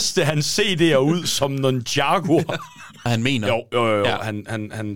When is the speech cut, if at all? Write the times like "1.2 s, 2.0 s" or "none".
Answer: 3.1 s